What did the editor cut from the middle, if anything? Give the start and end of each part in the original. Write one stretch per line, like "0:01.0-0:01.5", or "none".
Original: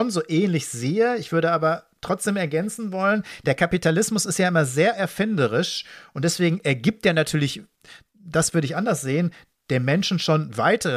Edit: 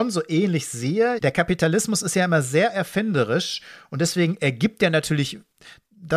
0:01.2-0:03.4